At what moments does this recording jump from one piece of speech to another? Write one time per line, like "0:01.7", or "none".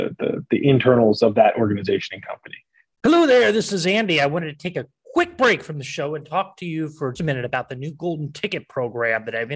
0:03.0
0:07.2